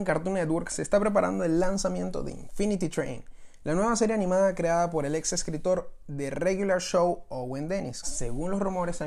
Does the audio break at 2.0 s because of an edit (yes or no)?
no